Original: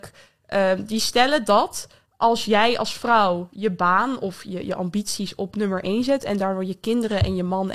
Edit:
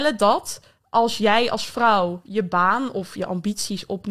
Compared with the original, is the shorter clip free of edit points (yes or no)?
no